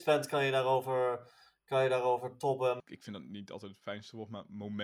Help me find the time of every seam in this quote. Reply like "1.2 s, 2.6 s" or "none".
2.8 s